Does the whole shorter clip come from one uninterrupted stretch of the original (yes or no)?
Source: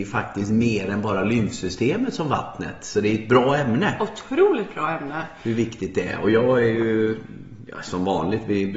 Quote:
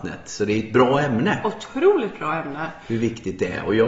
yes